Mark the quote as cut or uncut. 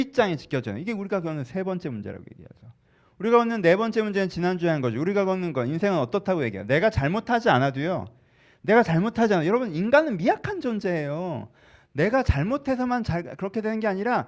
uncut